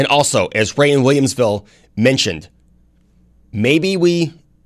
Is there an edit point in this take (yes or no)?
no